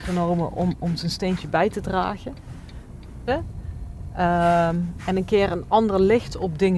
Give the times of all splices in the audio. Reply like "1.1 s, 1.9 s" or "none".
3.3 s